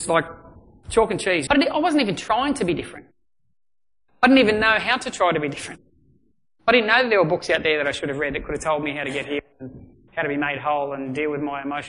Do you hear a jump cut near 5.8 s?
no; 1 cut; at 1.5 s

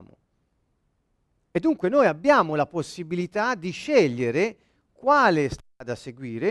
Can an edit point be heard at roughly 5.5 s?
no; 1 cut; at 1.3 s

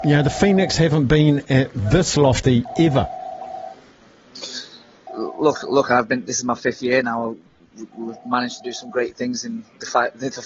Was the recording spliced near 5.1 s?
yes; 1 cut; at 5.1 s

